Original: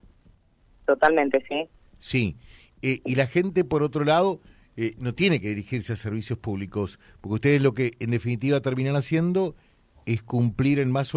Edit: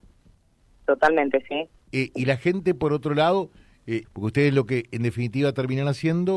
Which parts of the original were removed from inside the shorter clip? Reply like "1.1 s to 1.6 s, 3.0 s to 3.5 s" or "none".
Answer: 1.8 s to 2.7 s, 4.9 s to 7.1 s